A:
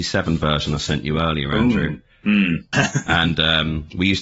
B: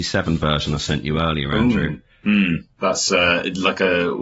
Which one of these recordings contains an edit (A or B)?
A